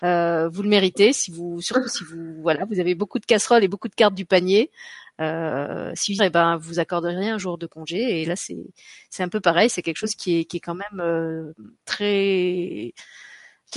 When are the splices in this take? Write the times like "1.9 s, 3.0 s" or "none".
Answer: 6.2 s